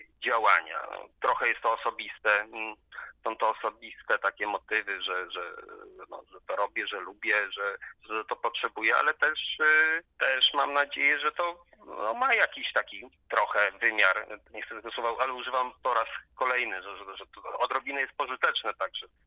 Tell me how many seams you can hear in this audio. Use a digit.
1